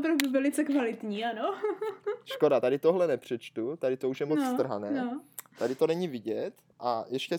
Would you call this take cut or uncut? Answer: uncut